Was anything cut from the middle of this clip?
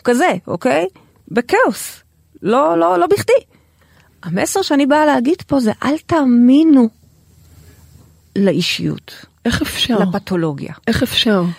no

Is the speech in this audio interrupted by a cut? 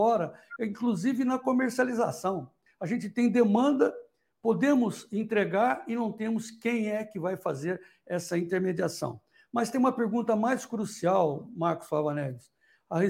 yes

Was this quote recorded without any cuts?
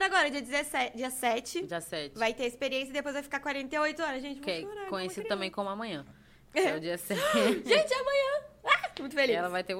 yes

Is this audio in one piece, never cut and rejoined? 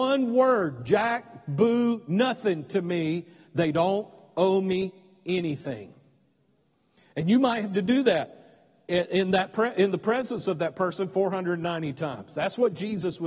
yes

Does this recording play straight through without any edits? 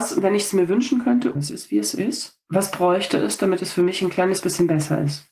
no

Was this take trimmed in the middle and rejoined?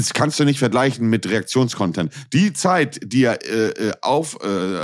no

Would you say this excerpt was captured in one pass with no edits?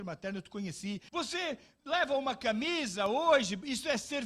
no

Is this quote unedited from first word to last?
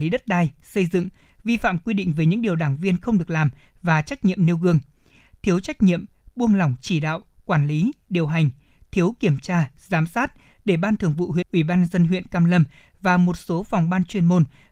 no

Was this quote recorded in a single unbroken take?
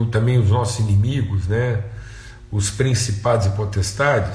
yes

